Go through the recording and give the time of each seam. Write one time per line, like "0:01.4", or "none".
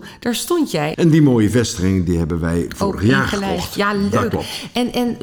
0:00.9

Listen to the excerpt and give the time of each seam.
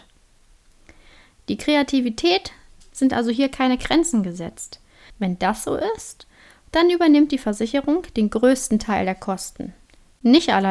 0:05.1

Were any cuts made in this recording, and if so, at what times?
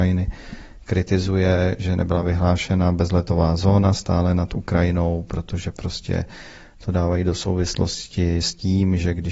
none

